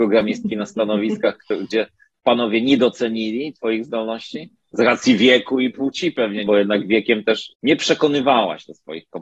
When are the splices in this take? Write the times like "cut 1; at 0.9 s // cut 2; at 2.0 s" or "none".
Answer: cut 1; at 6.5 s // cut 2; at 7.5 s